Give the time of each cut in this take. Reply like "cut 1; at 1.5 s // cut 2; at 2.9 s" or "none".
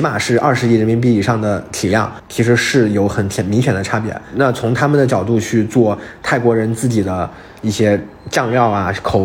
cut 1; at 2.2 s